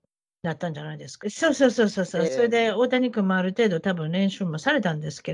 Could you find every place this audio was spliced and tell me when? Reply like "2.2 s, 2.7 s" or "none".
1.2 s, 2.3 s